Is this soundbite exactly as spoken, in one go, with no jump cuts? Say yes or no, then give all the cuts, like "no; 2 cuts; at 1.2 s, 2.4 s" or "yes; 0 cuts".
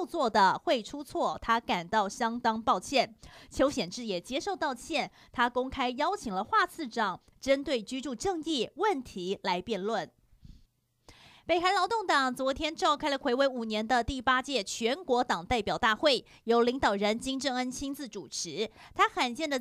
yes; 0 cuts